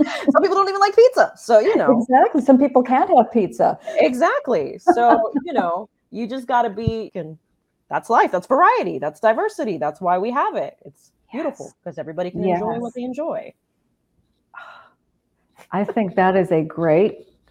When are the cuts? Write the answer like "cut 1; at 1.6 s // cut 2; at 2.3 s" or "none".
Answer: cut 1; at 7.1 s